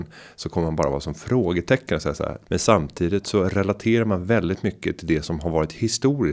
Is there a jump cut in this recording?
yes; 1 cut; at 2.5 s

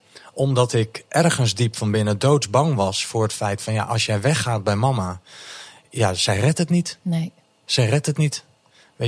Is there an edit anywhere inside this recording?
no; 0 cuts

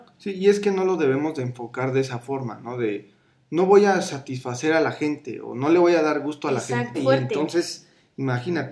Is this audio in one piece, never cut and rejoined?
no; 1 cut; at 6.9 s

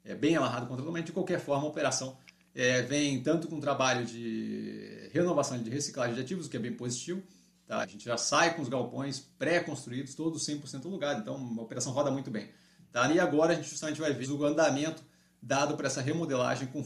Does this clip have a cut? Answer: yes; 3 cuts; at 7.8 s, 13.1 s, 14.2 s

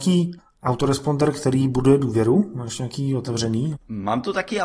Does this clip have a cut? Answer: yes; 1 cut; at 3.7 s

